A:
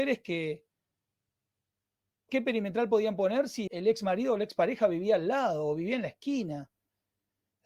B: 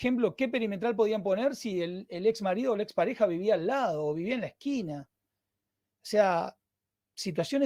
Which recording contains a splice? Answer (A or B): A